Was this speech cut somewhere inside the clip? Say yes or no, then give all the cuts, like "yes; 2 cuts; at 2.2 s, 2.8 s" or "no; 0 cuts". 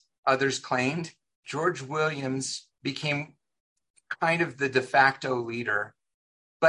yes; 2 cuts; at 1.3 s, 2.7 s